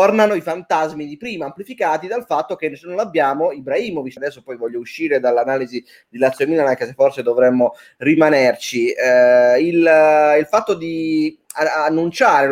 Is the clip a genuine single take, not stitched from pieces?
no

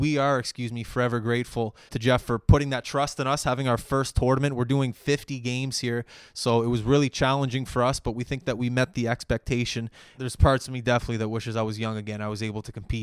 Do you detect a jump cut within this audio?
yes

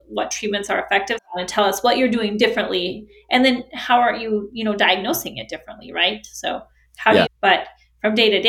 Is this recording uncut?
no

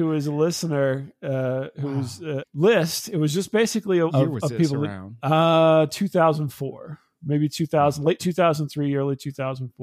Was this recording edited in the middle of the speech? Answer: yes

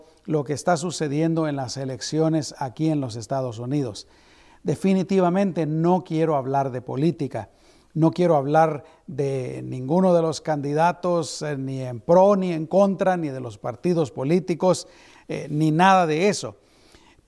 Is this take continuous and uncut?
yes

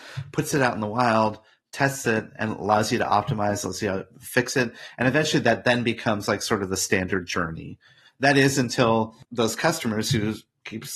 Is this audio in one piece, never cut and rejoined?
yes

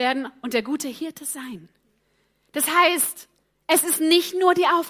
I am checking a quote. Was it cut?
no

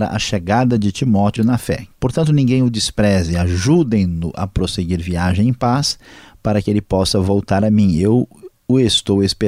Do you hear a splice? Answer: yes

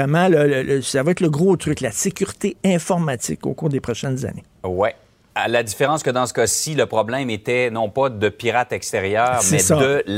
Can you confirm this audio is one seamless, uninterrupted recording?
yes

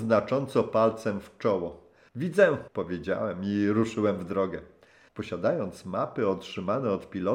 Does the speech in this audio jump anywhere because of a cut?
yes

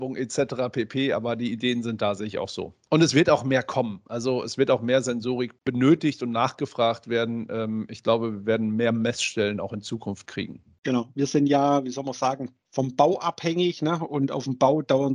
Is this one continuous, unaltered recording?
yes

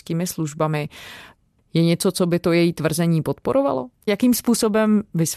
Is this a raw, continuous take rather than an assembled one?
yes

